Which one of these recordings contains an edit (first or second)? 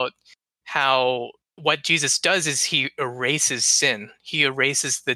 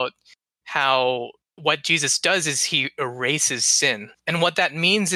second